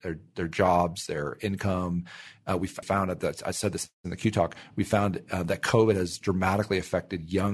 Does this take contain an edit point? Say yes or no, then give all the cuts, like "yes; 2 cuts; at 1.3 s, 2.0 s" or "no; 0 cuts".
yes; 2 cuts; at 2.8 s, 3.9 s